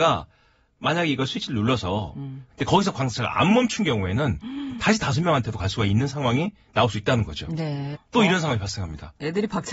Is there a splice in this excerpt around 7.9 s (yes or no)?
yes